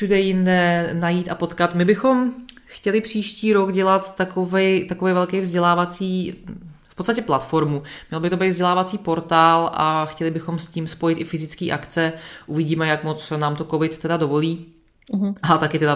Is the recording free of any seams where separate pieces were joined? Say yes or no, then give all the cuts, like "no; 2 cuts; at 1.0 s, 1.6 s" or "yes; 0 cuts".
yes; 0 cuts